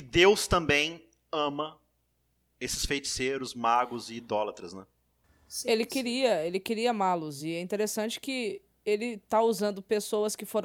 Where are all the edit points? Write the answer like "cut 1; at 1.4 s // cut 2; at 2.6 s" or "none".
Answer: none